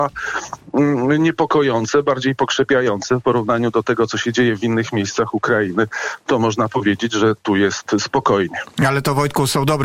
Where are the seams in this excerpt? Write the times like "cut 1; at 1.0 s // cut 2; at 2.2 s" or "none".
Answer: none